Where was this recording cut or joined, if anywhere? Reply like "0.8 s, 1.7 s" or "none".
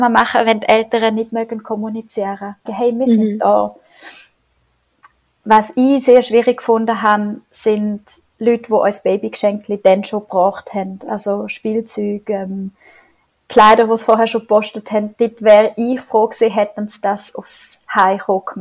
2.7 s